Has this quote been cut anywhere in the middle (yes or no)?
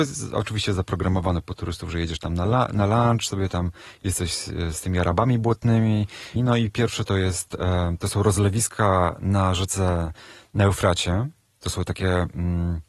yes